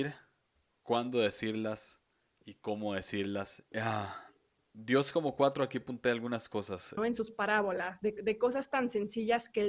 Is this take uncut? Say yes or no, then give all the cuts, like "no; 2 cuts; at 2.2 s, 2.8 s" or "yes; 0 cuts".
no; 2 cuts; at 3.7 s, 7.0 s